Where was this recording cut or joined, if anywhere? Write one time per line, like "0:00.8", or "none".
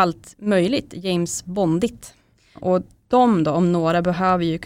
none